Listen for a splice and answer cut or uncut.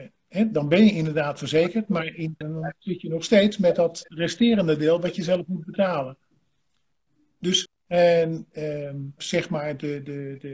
cut